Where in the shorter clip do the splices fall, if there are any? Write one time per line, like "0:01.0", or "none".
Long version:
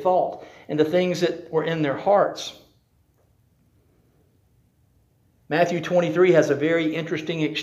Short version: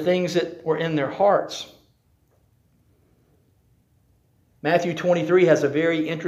none